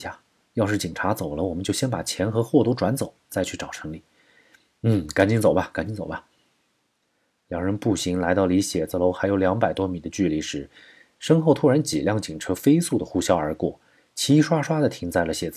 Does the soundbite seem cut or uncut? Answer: uncut